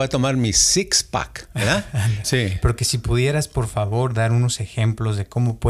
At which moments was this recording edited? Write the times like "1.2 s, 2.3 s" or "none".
2.2 s